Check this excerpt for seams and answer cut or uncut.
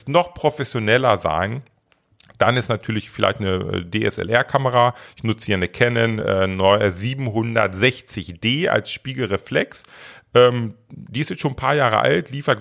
uncut